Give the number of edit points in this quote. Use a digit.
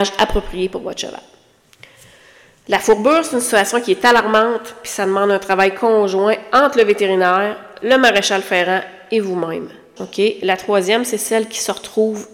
1